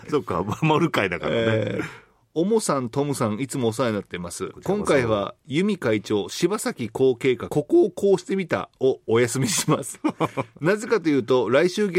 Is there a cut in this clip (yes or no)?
yes